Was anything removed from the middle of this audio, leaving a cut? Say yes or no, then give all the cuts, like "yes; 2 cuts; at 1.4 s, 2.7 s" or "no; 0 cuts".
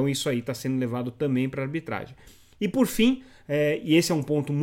no; 0 cuts